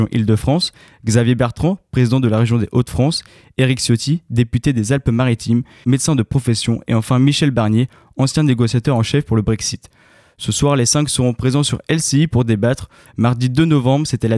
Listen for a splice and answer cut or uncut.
cut